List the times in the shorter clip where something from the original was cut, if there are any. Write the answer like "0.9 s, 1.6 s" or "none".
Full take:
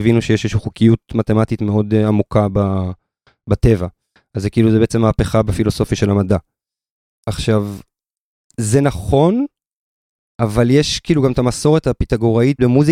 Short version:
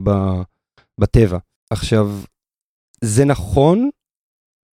1.6 s